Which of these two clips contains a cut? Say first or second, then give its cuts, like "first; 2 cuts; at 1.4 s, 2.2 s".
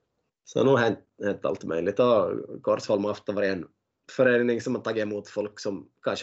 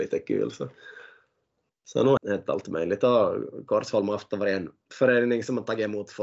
second; 2 cuts; at 2.2 s, 4.8 s